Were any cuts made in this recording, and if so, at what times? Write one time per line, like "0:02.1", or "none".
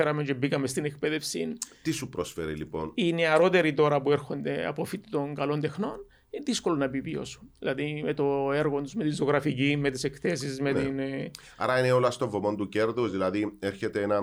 none